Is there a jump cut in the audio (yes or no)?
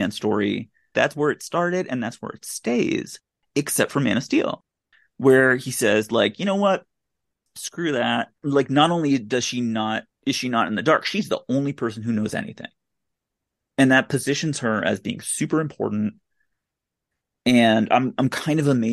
no